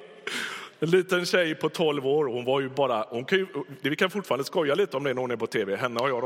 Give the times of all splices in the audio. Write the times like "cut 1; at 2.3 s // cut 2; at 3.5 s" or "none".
none